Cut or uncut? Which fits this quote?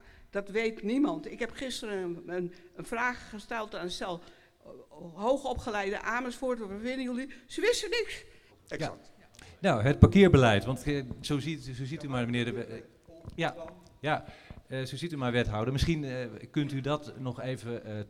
cut